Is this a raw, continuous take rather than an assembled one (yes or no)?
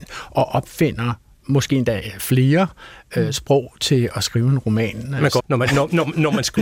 no